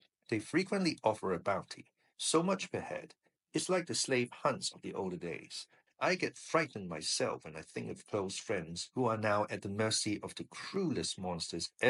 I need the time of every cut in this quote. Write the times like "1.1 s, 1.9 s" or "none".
5.9 s